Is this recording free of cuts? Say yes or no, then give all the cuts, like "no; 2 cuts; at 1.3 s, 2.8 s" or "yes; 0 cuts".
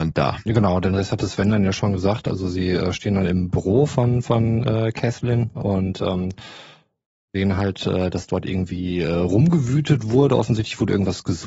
yes; 0 cuts